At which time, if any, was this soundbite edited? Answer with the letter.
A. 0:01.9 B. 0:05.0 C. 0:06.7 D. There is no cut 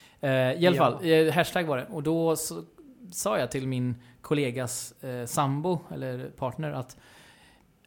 D